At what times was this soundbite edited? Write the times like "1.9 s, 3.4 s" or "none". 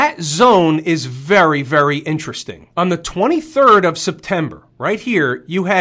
2.7 s

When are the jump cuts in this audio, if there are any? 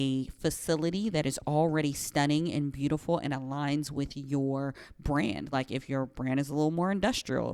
none

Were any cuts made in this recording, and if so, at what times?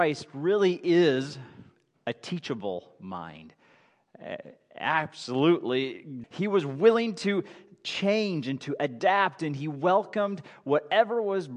6.2 s

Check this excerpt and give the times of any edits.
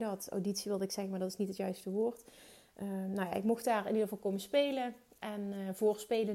none

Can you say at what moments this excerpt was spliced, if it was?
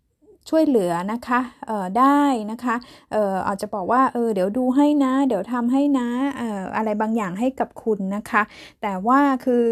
none

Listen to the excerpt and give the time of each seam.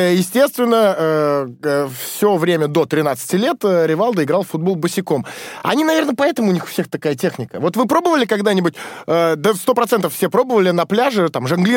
none

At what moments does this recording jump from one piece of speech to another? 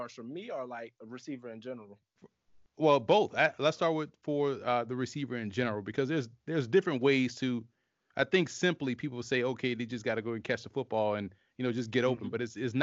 none

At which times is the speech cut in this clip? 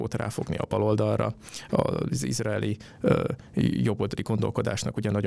none

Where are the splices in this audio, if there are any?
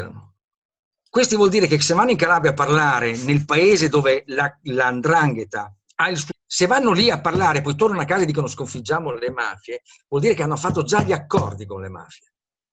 6.3 s

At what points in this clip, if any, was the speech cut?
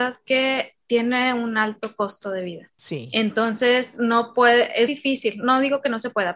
4.9 s

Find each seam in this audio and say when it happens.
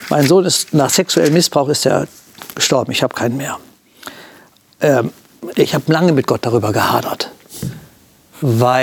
none

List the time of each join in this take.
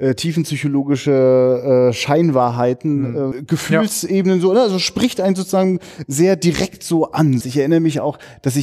3.3 s, 7.4 s

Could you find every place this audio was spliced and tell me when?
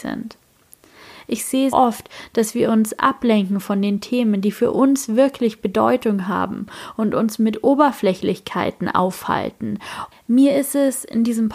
1.7 s, 10.1 s

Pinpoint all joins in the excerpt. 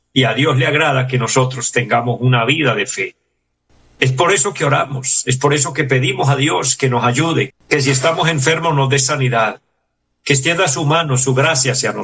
7.5 s

